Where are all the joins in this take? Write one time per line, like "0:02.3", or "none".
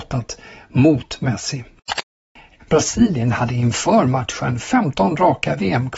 0:02.6